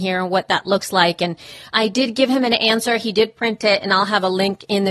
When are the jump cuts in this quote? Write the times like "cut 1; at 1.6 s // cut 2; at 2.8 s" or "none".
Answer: none